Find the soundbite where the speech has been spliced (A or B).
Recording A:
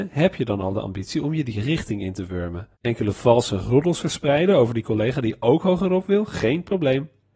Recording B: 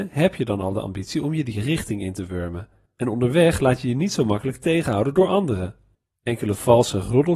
A